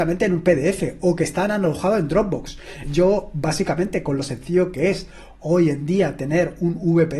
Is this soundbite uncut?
no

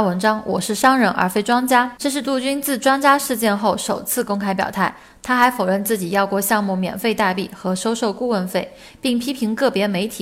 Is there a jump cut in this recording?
yes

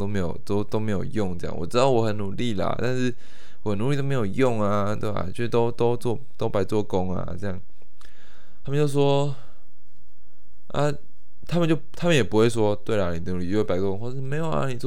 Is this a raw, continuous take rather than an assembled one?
yes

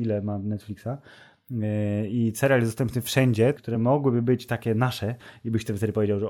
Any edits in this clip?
yes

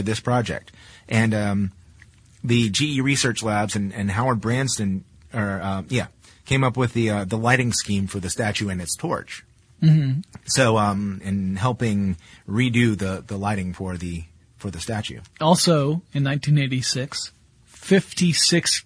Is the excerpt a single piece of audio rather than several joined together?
no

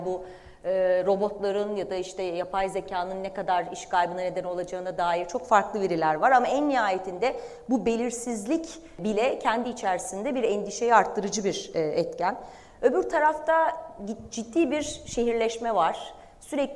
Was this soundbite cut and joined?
no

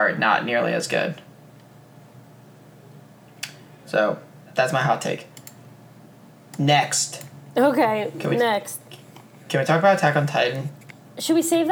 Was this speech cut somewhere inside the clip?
no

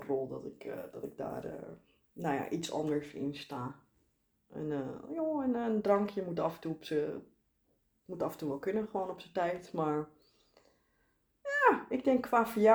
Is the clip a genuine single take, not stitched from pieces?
yes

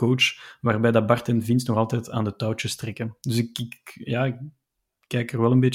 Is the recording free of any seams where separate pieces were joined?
yes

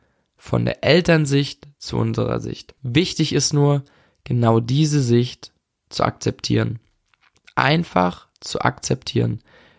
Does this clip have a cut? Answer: yes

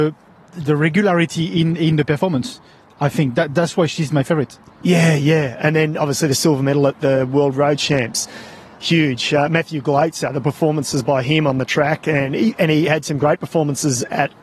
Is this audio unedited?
yes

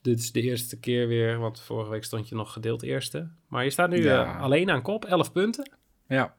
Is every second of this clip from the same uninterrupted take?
yes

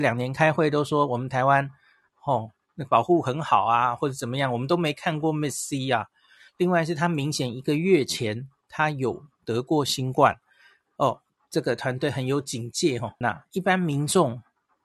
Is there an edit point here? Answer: yes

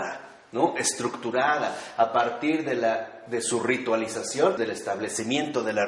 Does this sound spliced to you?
yes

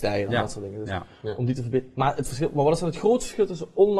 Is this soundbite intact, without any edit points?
yes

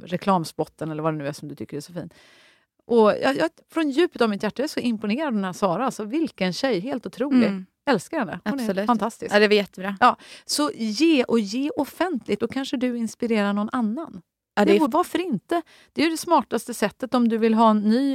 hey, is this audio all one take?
no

